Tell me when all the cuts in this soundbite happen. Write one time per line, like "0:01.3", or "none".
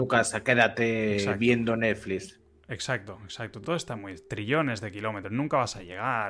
none